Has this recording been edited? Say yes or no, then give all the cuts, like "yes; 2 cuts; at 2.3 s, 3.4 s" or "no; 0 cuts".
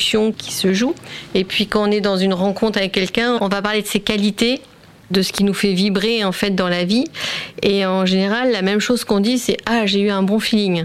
no; 0 cuts